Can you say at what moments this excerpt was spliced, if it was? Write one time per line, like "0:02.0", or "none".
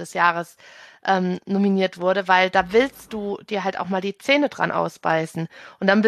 none

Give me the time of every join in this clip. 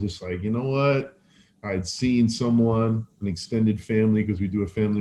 none

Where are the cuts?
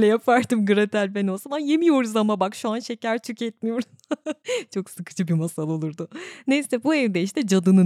none

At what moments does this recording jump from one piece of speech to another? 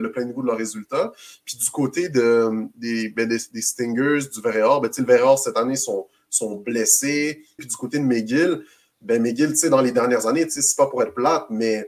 0:07.6

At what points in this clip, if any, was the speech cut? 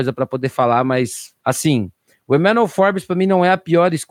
0:01.4

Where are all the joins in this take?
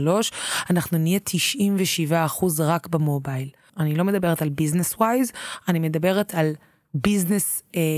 0:03.7

